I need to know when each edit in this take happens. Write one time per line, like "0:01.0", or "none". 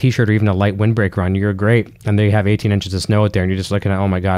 none